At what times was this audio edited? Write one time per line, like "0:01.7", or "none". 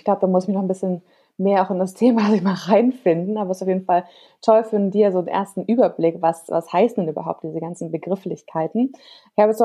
none